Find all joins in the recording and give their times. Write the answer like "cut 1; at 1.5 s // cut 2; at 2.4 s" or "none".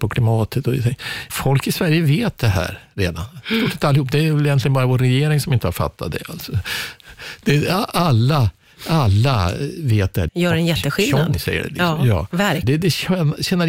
cut 1; at 1.3 s // cut 2; at 10.3 s // cut 3; at 12.6 s